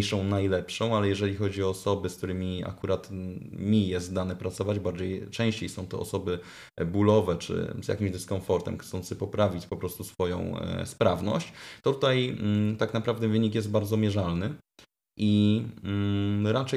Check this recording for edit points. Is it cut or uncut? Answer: uncut